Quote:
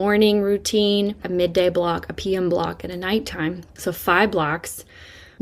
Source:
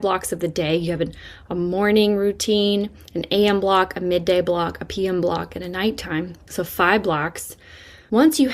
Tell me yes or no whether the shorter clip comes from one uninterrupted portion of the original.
no